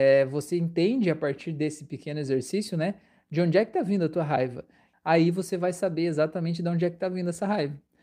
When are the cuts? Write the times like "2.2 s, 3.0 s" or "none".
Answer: 4.9 s